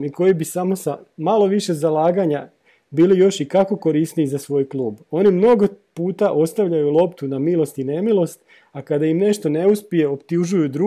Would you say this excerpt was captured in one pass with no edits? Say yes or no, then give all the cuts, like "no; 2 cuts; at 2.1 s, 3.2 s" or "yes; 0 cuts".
yes; 0 cuts